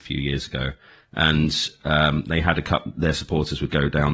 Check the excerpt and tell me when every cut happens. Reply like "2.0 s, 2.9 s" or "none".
none